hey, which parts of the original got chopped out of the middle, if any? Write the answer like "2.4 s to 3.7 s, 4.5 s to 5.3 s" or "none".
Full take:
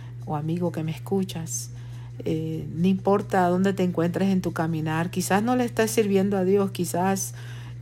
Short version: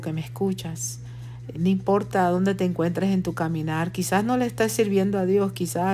2.2 s to 2.7 s